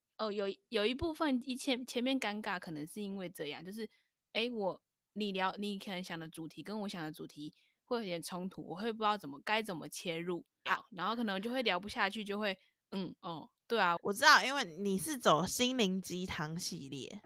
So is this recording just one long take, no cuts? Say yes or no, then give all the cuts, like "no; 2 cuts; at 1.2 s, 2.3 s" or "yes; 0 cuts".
no; 2 cuts; at 10.7 s, 14.0 s